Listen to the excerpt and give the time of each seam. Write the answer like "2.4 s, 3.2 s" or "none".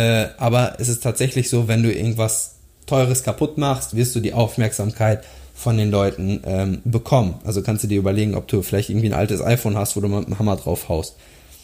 none